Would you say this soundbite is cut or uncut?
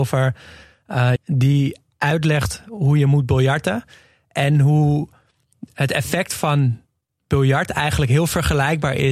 cut